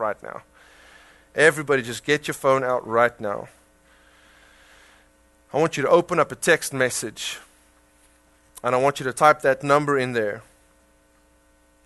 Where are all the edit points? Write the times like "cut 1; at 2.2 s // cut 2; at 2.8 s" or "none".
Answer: none